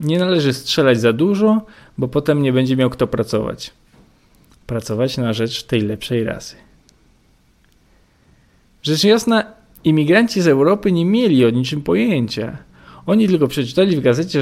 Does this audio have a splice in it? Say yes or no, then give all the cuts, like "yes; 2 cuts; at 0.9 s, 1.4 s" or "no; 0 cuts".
no; 0 cuts